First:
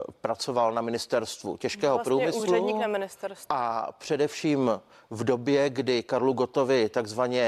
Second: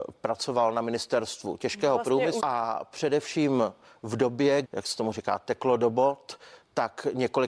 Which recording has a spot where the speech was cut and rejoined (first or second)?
second